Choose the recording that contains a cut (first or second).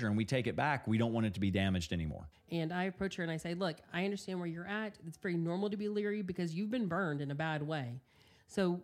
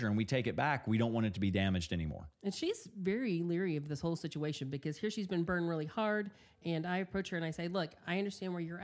first